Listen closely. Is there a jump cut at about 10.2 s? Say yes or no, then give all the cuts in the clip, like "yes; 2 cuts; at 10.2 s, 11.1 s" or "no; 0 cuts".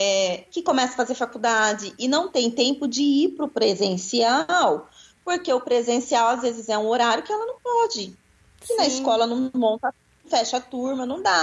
no; 0 cuts